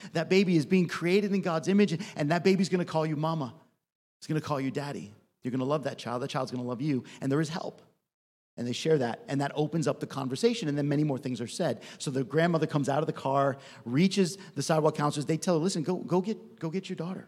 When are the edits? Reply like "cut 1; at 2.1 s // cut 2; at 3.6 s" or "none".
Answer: none